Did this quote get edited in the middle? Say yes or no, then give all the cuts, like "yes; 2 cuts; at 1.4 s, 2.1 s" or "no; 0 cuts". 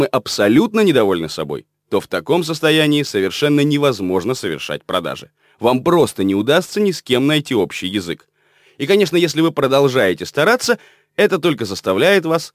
no; 0 cuts